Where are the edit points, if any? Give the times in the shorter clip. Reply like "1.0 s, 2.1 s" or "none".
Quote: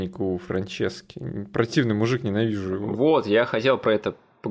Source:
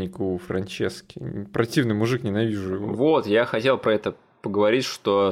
none